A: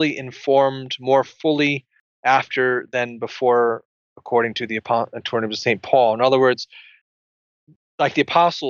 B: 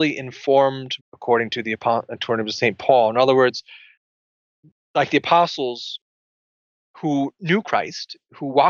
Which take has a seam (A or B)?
B